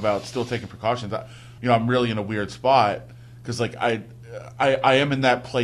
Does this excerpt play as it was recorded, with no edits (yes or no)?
no